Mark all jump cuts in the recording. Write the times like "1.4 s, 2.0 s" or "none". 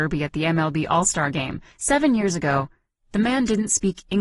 1.7 s